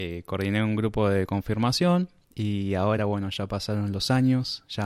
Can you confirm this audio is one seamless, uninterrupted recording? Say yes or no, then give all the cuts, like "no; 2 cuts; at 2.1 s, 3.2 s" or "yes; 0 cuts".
yes; 0 cuts